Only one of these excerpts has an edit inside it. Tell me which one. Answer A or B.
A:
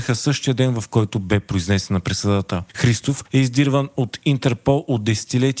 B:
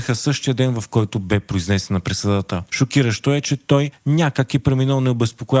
B